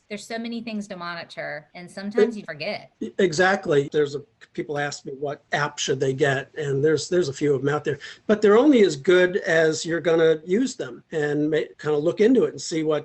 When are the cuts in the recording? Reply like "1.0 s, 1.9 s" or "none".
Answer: 2.5 s, 3.9 s